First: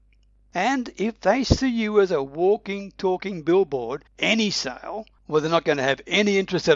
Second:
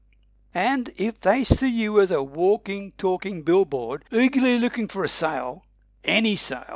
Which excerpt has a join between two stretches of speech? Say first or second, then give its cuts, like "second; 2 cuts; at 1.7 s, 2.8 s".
first; 2 cuts; at 4.1 s, 5.2 s